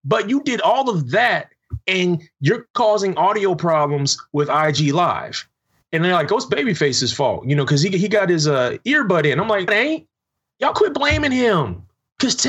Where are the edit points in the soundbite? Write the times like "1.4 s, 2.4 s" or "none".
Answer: 9.7 s